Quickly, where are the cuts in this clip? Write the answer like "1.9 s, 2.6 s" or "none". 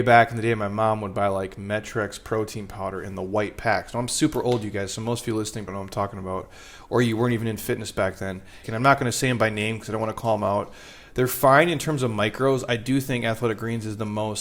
5.7 s, 8.6 s